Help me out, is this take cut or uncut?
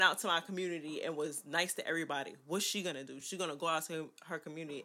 uncut